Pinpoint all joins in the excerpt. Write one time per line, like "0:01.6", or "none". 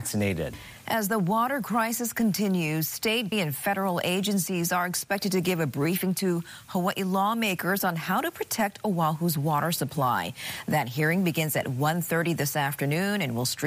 0:03.3